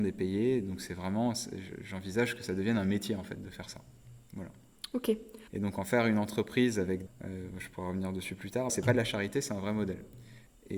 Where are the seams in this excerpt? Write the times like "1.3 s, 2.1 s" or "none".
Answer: 5.5 s, 7.1 s, 8.7 s